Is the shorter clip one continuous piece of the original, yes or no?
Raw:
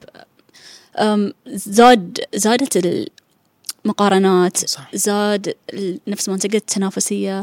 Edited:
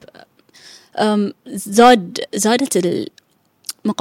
yes